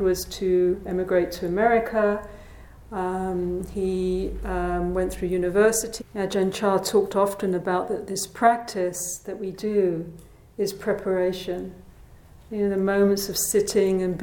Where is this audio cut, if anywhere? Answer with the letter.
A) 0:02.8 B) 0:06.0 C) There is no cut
B